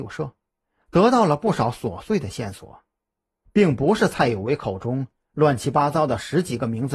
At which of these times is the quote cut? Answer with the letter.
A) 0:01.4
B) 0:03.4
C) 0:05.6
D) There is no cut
B